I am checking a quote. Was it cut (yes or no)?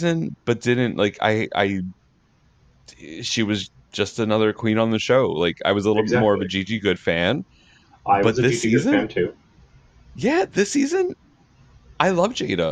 no